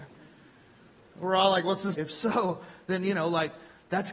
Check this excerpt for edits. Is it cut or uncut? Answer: cut